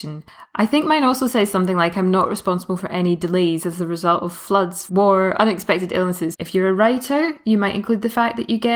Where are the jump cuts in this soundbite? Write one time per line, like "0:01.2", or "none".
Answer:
0:04.9
0:06.3